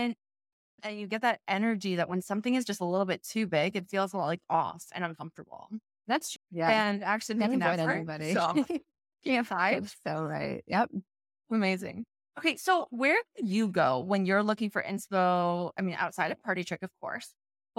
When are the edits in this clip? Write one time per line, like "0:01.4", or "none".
0:06.4